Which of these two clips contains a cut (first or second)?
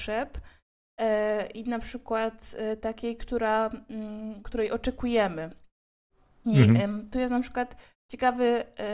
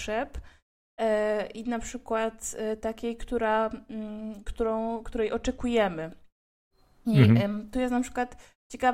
first